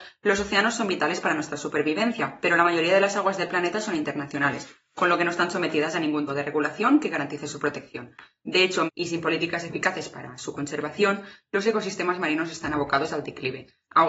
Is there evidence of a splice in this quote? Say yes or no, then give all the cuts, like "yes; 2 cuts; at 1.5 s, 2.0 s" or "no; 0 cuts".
yes; 2 cuts; at 6.3 s, 8.9 s